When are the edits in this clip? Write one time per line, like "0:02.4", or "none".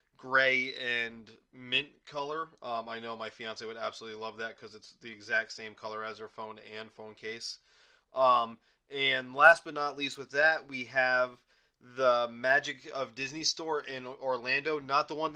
none